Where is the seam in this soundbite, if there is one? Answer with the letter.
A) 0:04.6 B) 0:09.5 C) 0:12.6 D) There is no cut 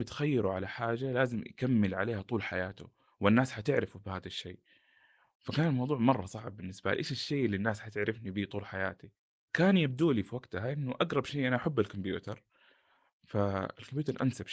D